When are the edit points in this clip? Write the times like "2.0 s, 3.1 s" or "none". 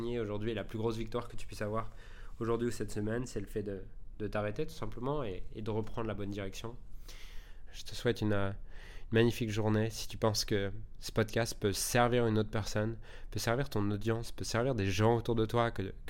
7.7 s